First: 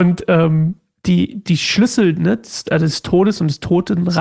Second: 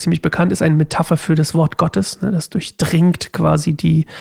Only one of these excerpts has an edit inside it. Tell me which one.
first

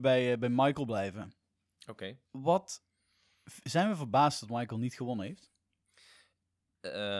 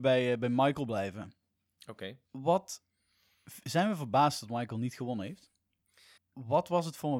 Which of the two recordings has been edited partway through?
second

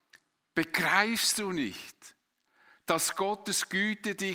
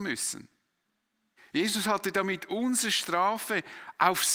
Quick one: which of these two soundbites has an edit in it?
second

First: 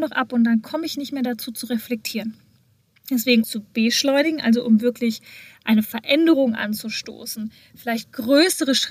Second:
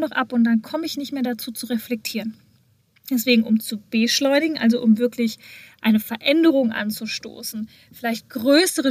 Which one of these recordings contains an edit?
first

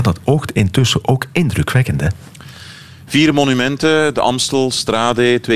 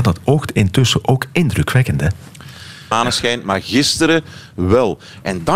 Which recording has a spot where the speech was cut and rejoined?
second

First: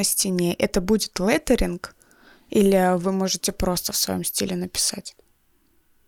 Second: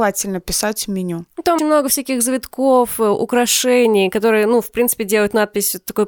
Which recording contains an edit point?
second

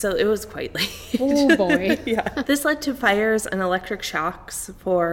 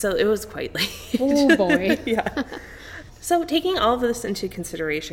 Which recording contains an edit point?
first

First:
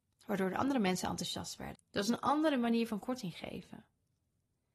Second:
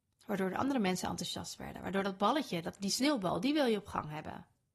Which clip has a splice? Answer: first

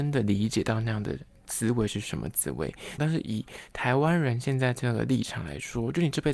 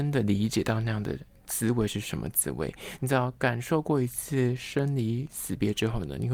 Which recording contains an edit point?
first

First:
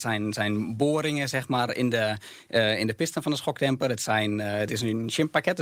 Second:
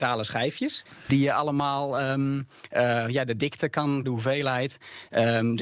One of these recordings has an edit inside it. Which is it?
second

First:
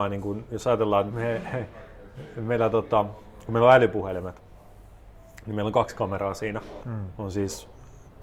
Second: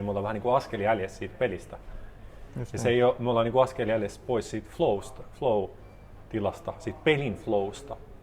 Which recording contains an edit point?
first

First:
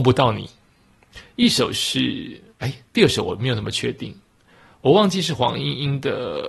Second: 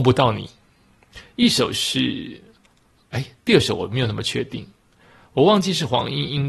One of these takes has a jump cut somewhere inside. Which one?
first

